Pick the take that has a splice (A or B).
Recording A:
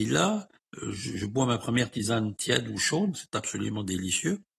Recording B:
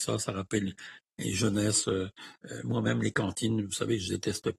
A